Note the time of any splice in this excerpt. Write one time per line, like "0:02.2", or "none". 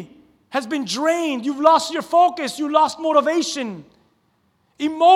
none